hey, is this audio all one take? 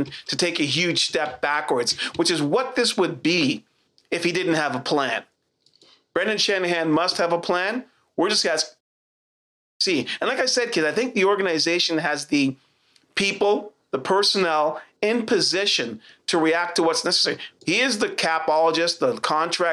no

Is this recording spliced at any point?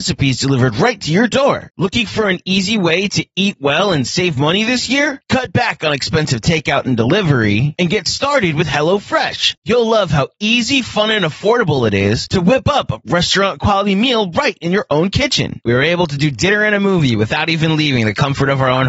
yes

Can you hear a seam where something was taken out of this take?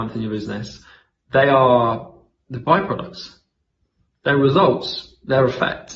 no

